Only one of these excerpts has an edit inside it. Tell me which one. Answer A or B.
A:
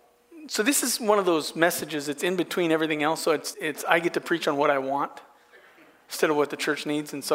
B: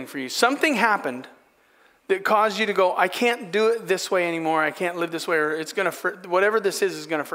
A